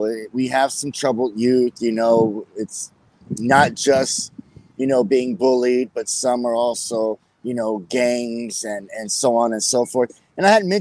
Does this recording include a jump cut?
no; 0 cuts

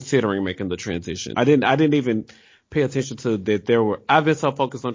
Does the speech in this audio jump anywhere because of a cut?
yes; 1 cut; at 1.3 s

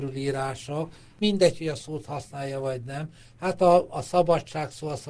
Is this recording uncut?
yes; 0 cuts

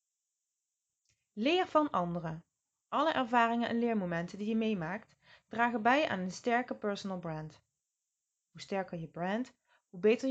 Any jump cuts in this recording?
yes; 1 cut; at 2.8 s

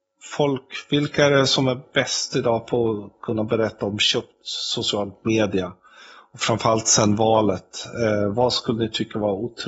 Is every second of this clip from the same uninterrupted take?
no; 1 cut; at 8.3 s

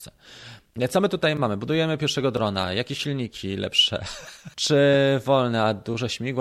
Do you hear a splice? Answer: yes; 1 cut; at 4.5 s

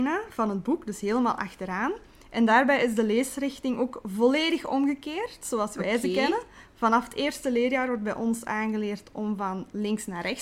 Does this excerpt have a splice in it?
no; 0 cuts

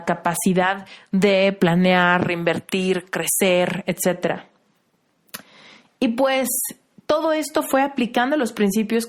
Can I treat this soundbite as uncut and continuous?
yes; 0 cuts

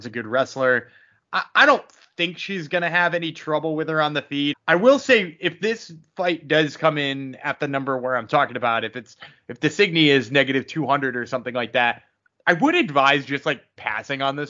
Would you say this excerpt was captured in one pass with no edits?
no; 1 cut; at 4.5 s

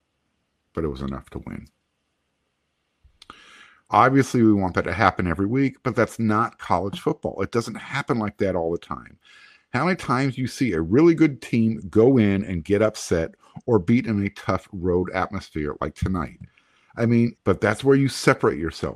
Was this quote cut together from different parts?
yes; 2 cuts; at 3.9 s, 17.3 s

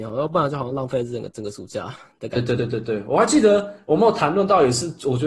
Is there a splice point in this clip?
yes; 1 cut; at 2.6 s

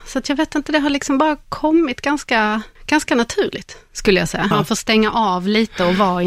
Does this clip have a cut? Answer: yes; 2 cuts; at 2.8 s, 4.5 s

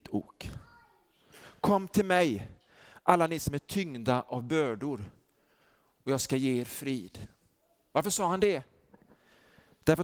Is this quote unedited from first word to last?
yes; 0 cuts

